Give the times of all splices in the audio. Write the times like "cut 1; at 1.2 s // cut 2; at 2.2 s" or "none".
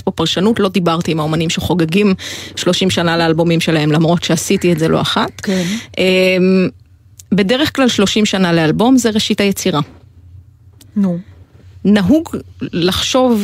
none

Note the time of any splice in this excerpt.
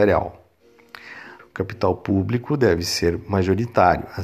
cut 1; at 1.4 s

